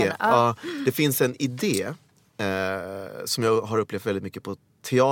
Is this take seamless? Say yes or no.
yes